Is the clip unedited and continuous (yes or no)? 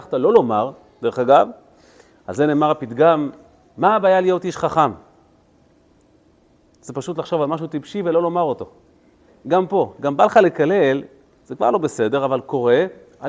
yes